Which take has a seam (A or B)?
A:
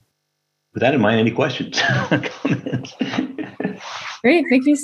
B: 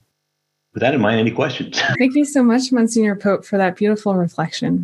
B